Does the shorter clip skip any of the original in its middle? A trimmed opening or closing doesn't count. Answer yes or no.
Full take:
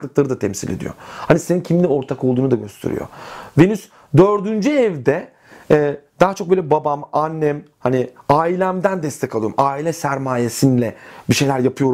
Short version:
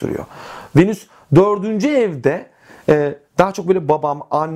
no